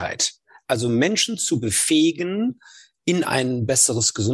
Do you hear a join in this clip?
no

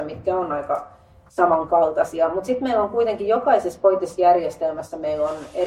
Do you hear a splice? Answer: no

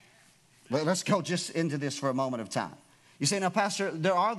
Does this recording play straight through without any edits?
yes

